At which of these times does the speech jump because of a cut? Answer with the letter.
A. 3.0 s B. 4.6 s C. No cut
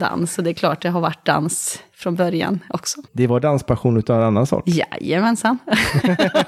A